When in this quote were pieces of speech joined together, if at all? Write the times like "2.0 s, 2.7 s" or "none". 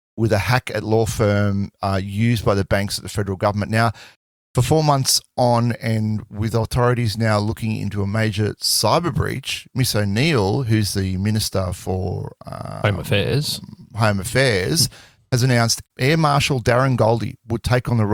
none